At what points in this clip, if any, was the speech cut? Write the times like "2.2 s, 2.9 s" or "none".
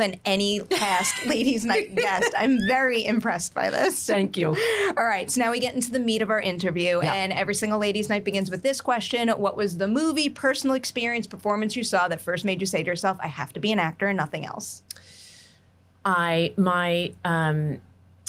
none